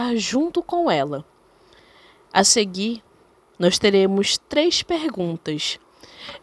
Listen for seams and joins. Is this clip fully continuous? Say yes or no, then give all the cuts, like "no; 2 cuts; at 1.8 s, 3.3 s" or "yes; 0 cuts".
yes; 0 cuts